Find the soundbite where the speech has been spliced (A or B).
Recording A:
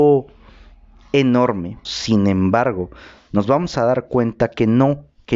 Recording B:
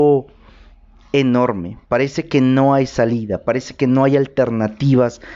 A